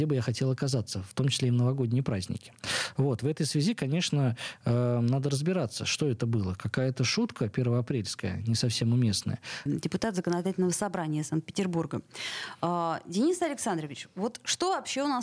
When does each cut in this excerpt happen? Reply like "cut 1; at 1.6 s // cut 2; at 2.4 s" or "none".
cut 1; at 9.7 s